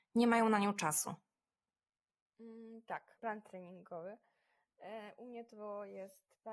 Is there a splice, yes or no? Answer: yes